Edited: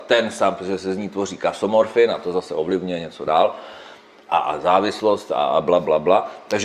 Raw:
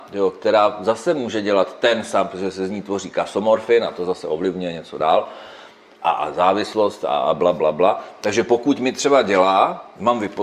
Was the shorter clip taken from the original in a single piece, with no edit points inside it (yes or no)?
yes